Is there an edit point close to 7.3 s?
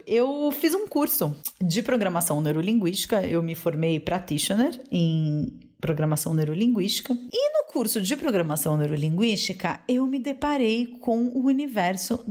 no; 0 cuts

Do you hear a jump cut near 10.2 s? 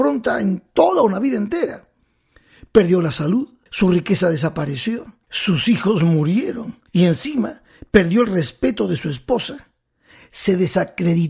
no; 3 cuts; at 3.7 s, 5.2 s, 6.9 s

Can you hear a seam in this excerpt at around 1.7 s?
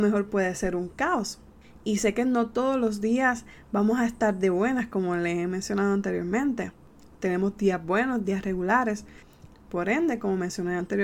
no; 2 cuts; at 8.2 s, 9.5 s

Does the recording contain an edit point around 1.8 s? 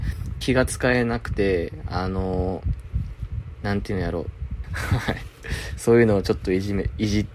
no; 1 cut; at 4.6 s

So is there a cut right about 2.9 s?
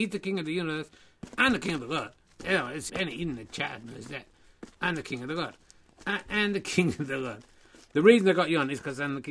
yes; 1 cut; at 2.9 s

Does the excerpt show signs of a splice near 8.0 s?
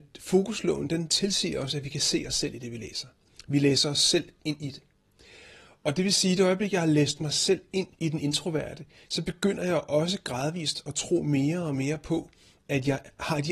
yes; 1 cut; at 8.0 s

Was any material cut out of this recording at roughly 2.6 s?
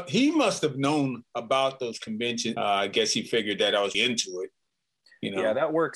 yes; 2 cuts; at 2.6 s, 3.9 s

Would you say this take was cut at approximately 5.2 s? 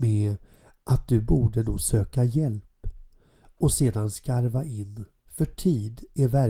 yes; 1 cut; at 5.2 s

